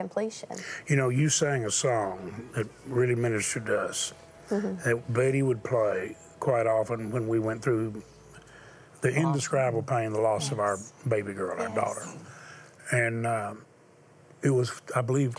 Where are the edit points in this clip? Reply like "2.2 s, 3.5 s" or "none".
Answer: none

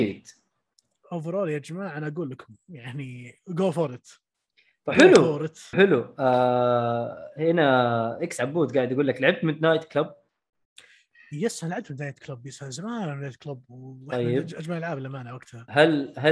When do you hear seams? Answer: 5.7 s

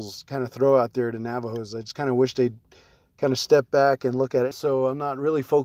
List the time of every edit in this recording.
4.5 s

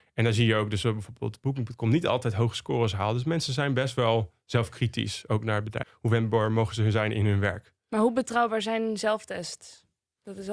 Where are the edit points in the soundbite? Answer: 5.8 s

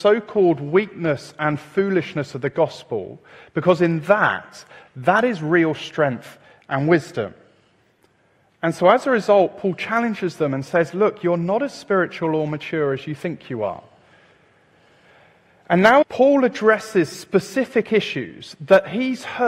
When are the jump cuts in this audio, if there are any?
16.0 s

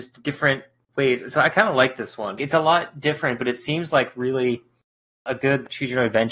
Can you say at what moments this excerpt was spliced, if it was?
none

